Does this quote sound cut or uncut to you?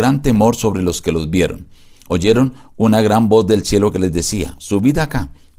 uncut